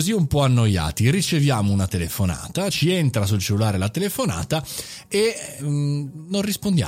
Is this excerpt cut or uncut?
cut